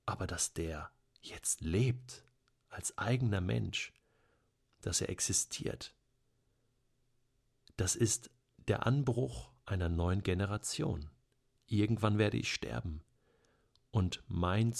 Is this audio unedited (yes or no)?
yes